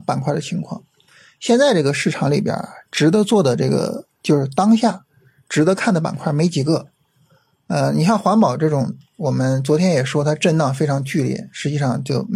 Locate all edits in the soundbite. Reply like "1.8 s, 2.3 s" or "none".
none